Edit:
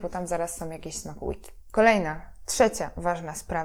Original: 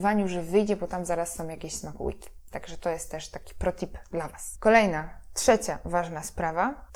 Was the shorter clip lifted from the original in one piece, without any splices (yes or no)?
no